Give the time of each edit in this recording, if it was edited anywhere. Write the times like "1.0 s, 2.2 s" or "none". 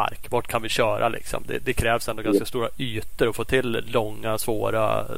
none